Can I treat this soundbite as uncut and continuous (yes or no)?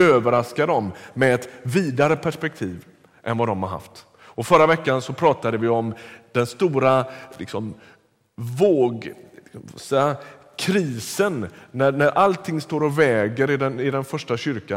yes